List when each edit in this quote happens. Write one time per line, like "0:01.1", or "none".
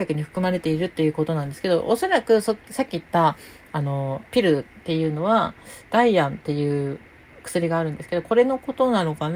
0:04.3

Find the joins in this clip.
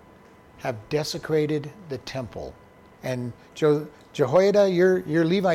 0:02.9

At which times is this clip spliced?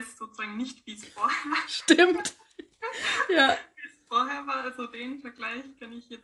none

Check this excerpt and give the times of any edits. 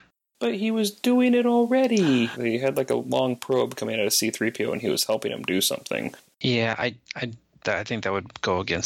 0:02.3
0:06.2

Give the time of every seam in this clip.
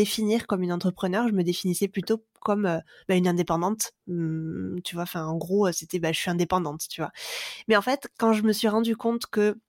none

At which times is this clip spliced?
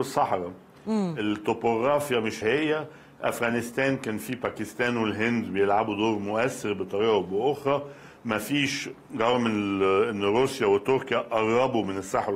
0:02.4

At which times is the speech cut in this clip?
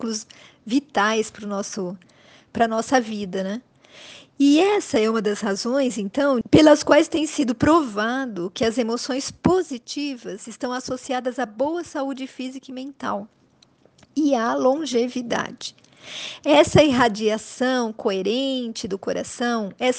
0:06.4

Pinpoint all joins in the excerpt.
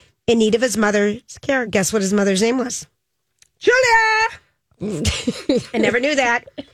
none

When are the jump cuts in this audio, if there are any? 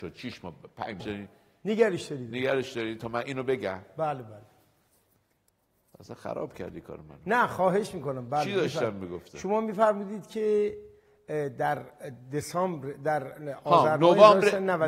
0:01.0

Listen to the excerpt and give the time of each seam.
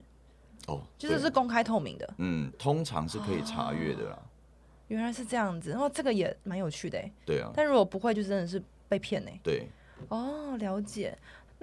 0:02.5

